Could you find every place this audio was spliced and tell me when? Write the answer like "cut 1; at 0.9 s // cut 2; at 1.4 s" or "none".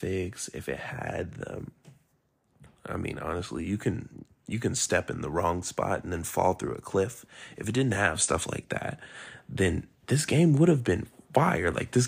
cut 1; at 10.0 s